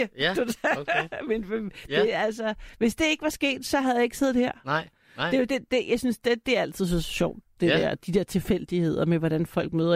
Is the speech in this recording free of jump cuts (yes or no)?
yes